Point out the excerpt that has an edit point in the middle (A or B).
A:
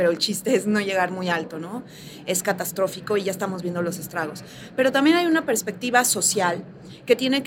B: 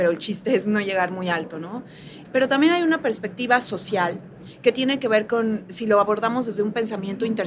B